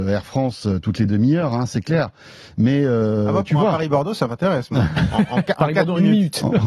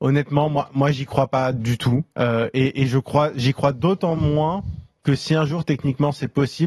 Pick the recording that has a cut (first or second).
second